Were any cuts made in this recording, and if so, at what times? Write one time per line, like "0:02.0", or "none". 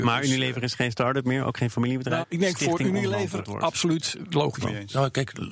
0:02.2
0:04.6